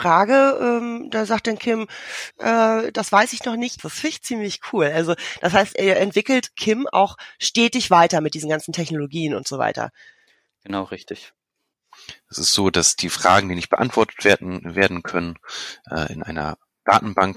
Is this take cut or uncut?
cut